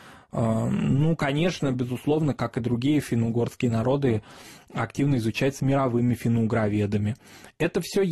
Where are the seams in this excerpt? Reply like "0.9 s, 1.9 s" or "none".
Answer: none